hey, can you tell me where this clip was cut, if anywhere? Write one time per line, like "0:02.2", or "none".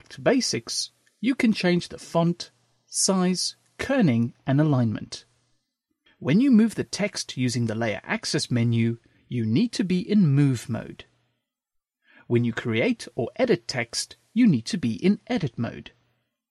0:06.1